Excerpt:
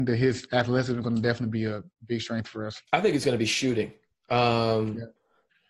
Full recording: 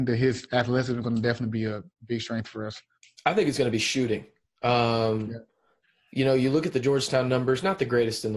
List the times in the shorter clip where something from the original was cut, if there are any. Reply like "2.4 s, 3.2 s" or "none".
2.9 s